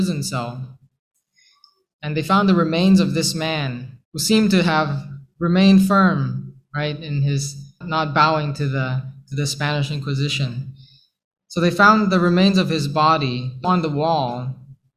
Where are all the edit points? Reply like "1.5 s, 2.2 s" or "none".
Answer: 4.0 s, 7.8 s, 13.6 s